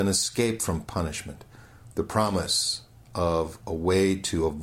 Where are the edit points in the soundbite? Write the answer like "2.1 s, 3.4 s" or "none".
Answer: 1.9 s